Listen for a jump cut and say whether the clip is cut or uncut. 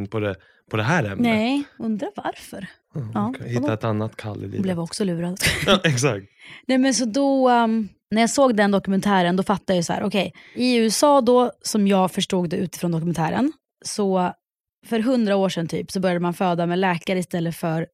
uncut